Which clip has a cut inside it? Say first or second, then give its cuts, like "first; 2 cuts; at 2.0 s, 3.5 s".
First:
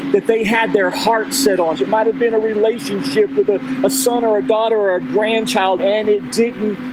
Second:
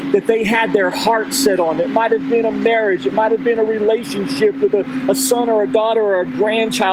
first; 2 cuts; at 1.7 s, 5.8 s